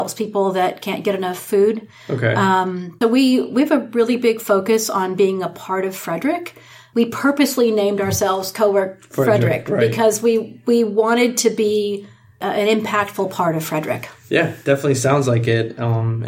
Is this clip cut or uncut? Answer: uncut